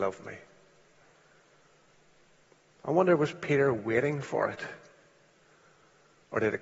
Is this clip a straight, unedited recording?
yes; 0 cuts

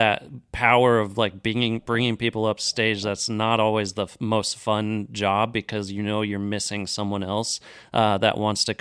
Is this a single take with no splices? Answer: yes; 0 cuts

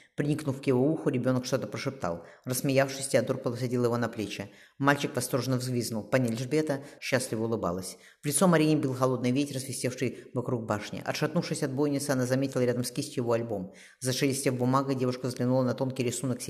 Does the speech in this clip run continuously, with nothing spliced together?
no; 1 cut; at 7.0 s

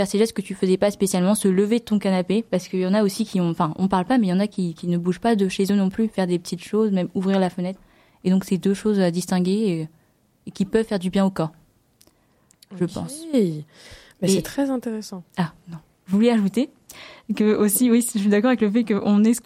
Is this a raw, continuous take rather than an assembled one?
yes; 0 cuts

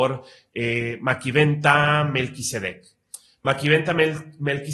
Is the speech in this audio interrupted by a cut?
no; 0 cuts

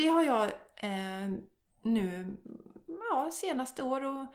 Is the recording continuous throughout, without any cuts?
yes; 0 cuts

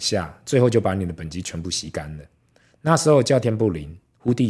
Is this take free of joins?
no; 1 cut; at 3.4 s

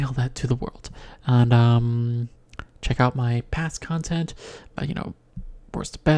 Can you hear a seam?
yes; 1 cut; at 4.8 s

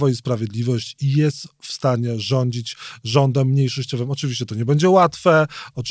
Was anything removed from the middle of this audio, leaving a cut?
no; 0 cuts

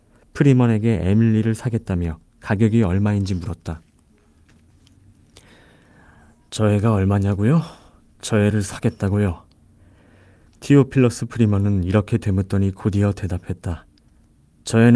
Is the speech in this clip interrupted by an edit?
no; 0 cuts

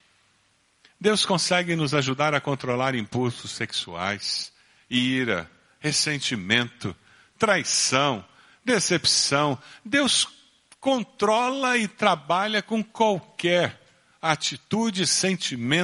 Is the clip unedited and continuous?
yes; 0 cuts

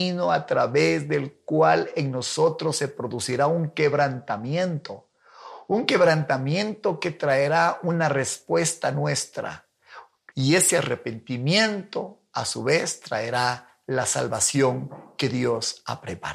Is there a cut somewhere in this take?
yes; 1 cut; at 10.3 s

